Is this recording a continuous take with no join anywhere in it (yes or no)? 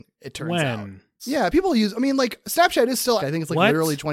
no